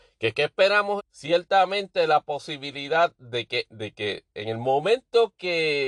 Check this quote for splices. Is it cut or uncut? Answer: cut